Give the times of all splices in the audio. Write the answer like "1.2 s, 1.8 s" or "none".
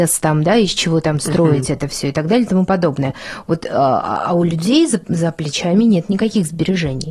none